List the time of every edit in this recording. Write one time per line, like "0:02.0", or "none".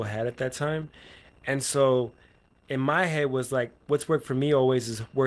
none